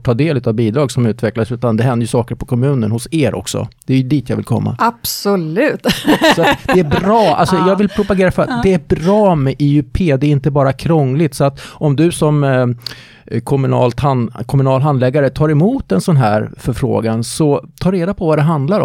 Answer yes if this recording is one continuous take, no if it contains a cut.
yes